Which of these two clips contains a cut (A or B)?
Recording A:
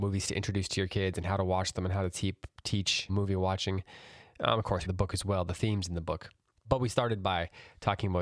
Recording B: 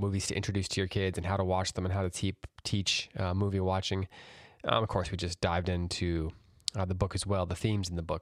A